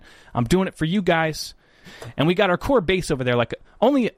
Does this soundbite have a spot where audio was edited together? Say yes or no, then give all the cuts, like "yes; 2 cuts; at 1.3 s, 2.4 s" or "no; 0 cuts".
yes; 1 cut; at 1.8 s